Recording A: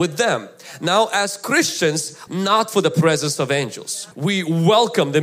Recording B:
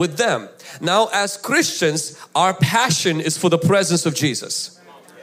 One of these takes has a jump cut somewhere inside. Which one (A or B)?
A